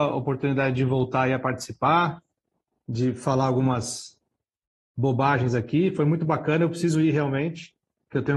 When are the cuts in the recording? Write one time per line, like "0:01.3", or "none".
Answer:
none